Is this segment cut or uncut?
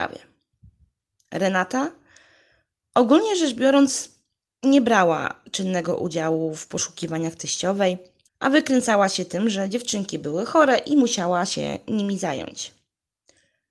cut